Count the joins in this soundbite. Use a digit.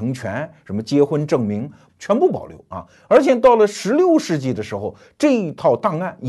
1